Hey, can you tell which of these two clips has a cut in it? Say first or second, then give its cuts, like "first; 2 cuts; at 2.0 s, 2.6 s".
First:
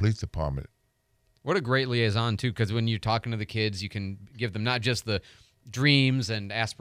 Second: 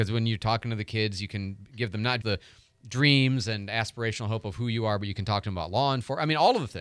second; 1 cut; at 2.2 s